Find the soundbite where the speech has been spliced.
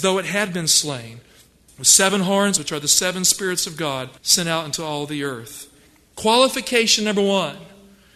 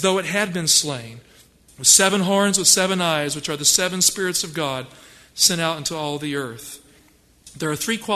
first; 3 cuts; at 2.6 s, 4.2 s, 6.1 s

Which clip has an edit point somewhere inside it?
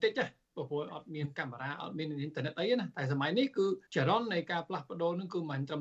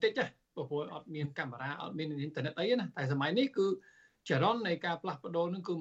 first; 1 cut; at 3.9 s

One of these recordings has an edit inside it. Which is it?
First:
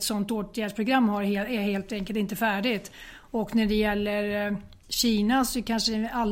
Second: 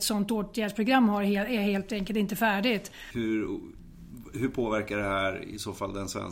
second; 1 cut; at 3.1 s

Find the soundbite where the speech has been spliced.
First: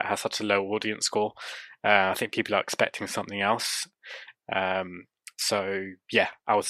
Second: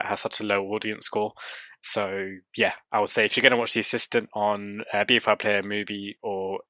second; 1 cut; at 1.8 s

